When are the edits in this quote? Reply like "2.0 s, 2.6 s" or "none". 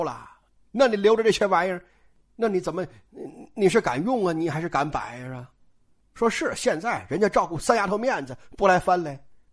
none